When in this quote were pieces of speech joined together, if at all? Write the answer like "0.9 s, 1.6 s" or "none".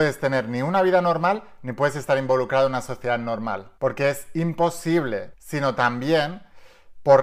3.8 s, 5.3 s